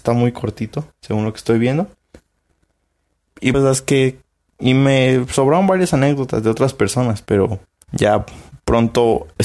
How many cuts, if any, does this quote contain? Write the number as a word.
one